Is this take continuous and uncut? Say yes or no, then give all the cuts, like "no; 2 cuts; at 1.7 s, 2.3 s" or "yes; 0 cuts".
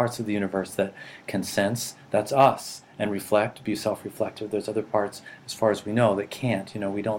yes; 0 cuts